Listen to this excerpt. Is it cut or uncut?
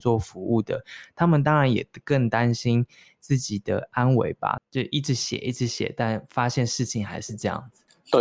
cut